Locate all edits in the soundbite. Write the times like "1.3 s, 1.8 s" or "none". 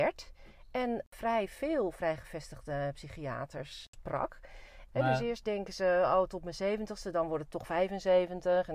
4.9 s